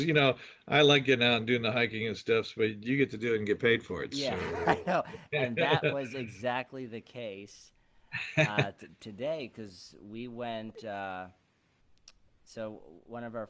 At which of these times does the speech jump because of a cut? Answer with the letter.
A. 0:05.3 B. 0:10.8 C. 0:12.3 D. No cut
D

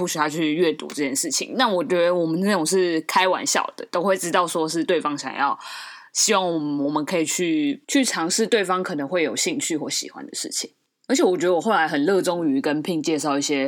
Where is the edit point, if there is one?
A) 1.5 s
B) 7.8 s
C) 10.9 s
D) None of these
B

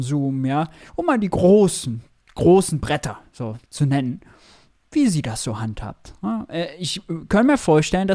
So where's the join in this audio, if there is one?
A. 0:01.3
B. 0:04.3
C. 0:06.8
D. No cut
D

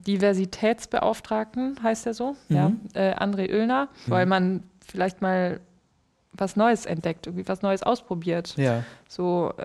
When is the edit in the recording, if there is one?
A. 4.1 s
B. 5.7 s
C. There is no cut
A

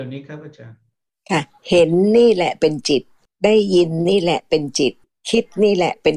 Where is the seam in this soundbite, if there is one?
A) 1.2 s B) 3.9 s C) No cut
C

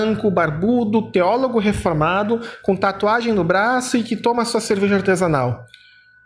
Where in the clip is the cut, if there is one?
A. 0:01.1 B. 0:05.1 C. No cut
C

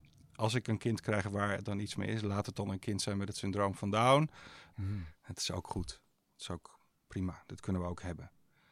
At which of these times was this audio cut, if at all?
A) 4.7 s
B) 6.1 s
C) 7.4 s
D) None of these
A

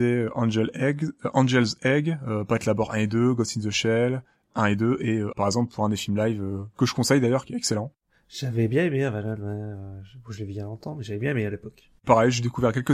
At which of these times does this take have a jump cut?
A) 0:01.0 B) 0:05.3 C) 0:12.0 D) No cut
B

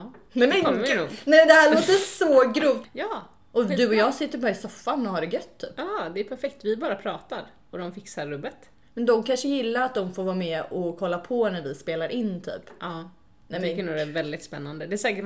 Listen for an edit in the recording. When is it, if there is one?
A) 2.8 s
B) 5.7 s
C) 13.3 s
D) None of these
A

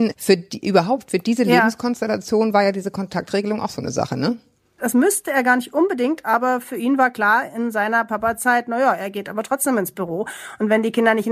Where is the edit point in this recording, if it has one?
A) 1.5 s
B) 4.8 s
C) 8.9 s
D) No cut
B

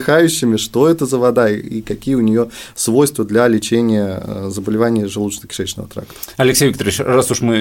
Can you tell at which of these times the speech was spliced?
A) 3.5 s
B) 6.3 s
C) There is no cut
C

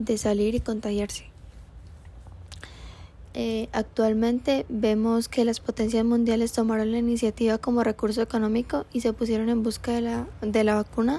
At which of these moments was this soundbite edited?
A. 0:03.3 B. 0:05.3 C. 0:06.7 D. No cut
A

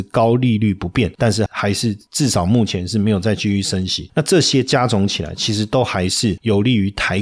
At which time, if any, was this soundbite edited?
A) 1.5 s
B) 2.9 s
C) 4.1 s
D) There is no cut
A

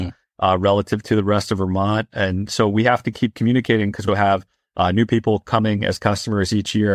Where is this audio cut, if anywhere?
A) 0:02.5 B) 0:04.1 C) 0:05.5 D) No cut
B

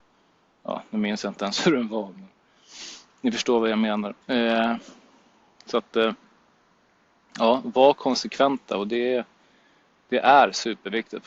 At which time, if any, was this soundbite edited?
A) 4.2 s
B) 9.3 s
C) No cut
A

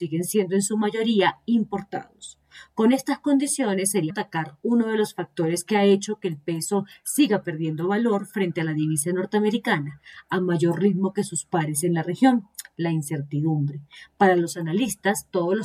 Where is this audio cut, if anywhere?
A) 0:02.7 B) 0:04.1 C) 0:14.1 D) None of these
B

